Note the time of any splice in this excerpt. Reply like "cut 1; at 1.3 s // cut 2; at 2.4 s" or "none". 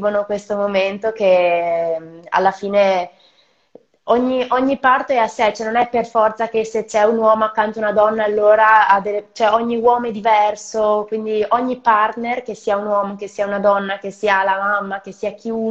none